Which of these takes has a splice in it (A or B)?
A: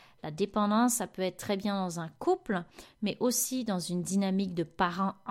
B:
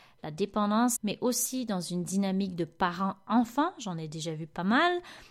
B